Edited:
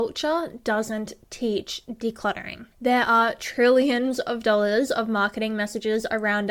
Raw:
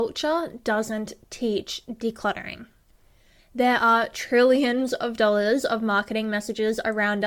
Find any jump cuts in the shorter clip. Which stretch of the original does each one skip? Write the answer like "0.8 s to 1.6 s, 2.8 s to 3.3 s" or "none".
2.7 s to 3.4 s

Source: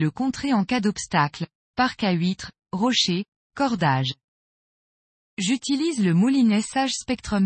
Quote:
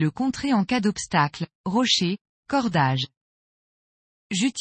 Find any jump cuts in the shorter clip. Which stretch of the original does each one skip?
1.6 s to 2.7 s

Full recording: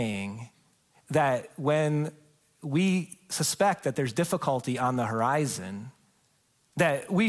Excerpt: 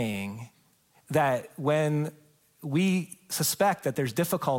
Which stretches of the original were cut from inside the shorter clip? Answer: none

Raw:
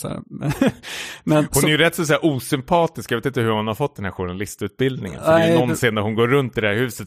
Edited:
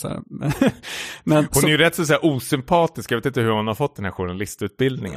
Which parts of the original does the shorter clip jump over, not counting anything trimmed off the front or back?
none

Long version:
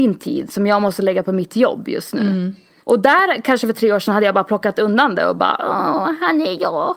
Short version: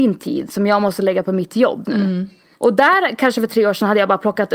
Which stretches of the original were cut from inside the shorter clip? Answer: 1.9 s to 2.1 s

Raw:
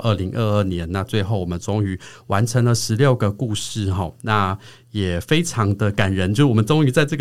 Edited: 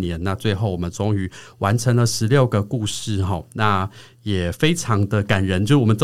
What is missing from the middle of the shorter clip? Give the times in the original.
none

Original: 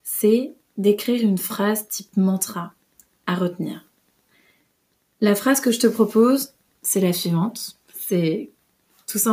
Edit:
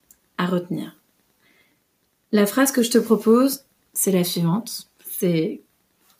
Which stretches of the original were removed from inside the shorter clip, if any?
none

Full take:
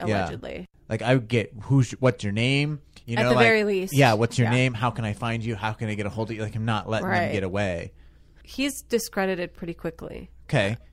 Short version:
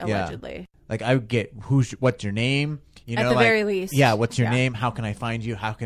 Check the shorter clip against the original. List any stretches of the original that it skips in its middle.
none

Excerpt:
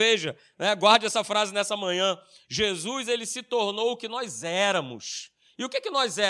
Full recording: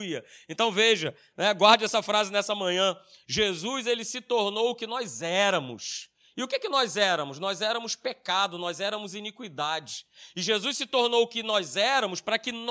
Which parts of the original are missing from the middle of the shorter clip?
none

